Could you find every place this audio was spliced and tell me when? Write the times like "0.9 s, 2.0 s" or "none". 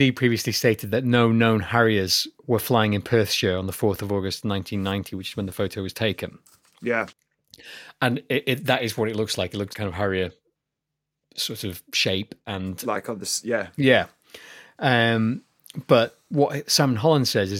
9.7 s